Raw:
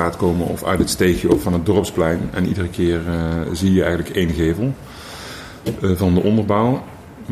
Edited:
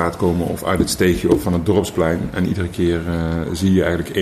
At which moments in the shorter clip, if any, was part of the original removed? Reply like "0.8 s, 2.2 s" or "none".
none